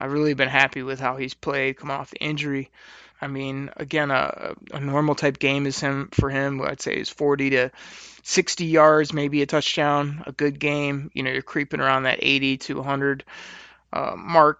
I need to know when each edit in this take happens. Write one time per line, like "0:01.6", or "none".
0:03.1